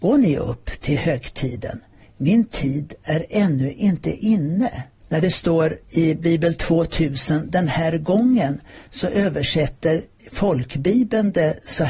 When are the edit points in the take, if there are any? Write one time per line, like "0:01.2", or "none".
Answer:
0:02.0
0:05.0